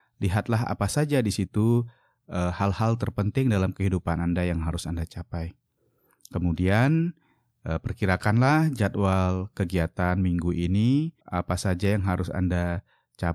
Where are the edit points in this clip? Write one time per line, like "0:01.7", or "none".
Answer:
0:11.2